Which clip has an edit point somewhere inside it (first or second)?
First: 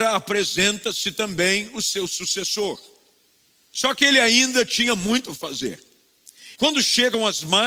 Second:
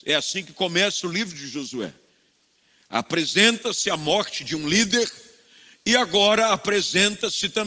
first